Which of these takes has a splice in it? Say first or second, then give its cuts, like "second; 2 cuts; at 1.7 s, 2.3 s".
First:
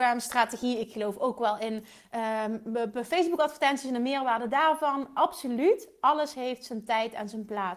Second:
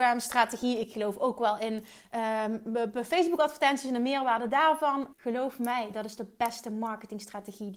second; 1 cut; at 5.1 s